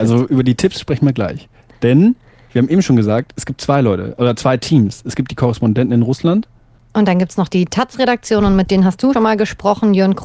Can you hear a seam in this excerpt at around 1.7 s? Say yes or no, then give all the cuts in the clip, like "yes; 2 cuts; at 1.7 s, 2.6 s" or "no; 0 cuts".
no; 1 cut; at 9.1 s